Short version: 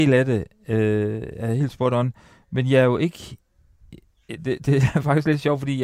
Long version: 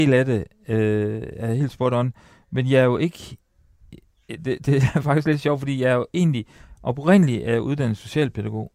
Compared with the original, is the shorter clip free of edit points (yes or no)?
yes